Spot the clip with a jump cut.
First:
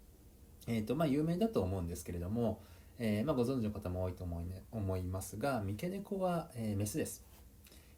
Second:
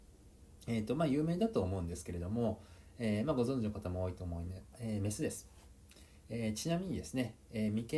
second; 1 cut; at 4.7 s

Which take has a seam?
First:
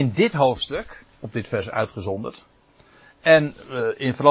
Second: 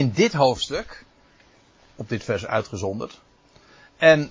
first; 1 cut; at 1.1 s

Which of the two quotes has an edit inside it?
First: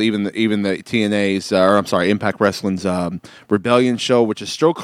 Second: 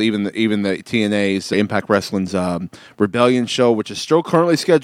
second; 1 cut; at 1.5 s

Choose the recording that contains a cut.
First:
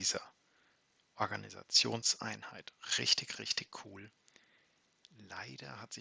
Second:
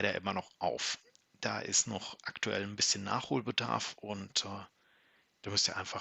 second; 1 cut; at 1.2 s

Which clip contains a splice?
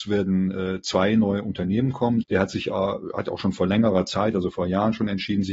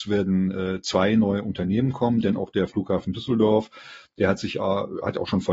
first; 1 cut; at 2.2 s

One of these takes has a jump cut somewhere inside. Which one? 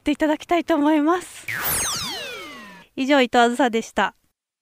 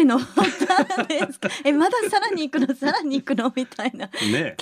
first; 1 cut; at 2.8 s

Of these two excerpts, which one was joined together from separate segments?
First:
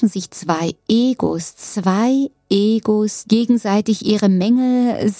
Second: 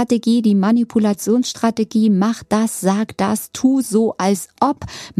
first; 1 cut; at 3.2 s

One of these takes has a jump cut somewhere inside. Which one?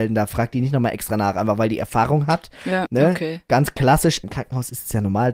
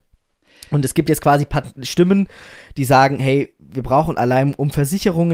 first; 2 cuts; at 2.9 s, 4.2 s

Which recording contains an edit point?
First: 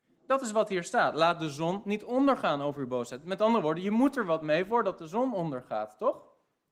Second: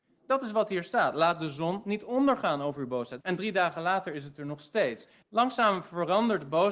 second; 2 cuts; at 3.2 s, 5.2 s

